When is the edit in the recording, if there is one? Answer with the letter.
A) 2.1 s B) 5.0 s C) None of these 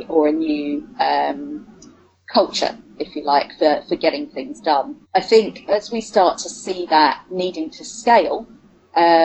B